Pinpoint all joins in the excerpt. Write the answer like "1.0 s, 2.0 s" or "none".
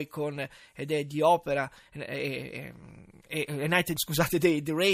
4.0 s